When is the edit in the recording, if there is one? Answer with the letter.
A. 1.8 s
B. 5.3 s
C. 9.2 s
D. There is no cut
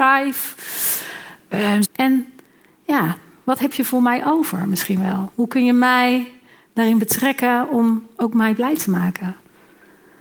A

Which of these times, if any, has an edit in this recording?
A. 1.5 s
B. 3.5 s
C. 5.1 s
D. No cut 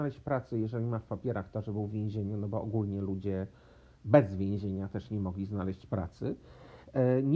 D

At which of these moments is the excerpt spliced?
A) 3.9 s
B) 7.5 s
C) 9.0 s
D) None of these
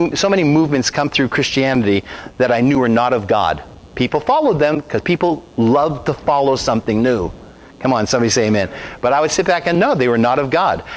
D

